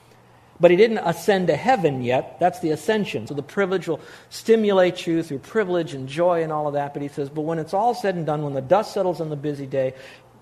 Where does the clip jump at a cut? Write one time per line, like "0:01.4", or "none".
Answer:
0:03.3

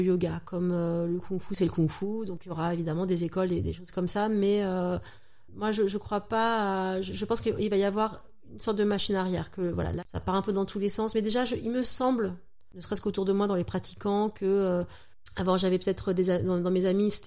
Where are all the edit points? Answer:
none

